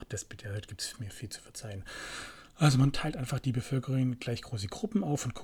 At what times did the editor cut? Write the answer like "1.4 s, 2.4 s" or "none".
none